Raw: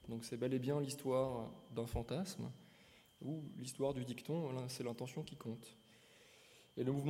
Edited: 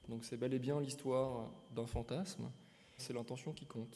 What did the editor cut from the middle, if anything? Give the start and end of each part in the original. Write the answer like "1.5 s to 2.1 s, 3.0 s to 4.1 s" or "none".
3.0 s to 4.7 s